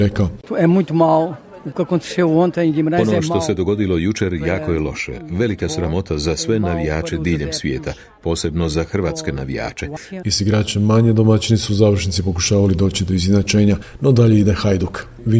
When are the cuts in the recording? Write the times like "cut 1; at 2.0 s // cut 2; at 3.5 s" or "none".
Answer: cut 1; at 10.2 s